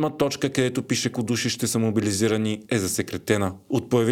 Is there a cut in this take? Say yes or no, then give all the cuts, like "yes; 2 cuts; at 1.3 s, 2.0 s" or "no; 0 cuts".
yes; 1 cut; at 1.1 s